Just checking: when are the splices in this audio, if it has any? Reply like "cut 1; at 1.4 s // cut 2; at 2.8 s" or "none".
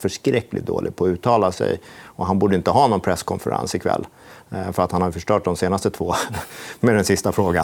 none